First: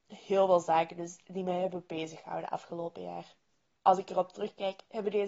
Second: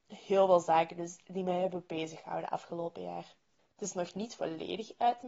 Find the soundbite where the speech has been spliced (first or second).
second